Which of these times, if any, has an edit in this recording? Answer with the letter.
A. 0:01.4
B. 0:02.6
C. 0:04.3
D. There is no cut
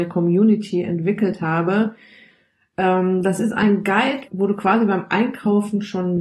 C